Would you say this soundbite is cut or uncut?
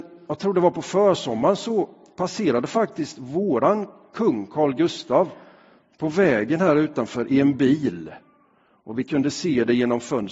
uncut